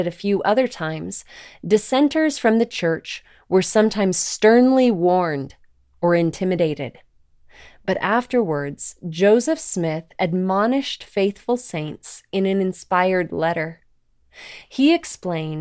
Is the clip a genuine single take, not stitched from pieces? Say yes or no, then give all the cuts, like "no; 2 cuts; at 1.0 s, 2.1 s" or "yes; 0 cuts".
yes; 0 cuts